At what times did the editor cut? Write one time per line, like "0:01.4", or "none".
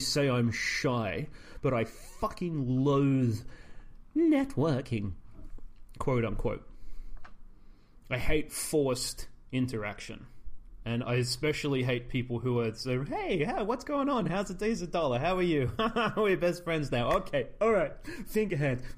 none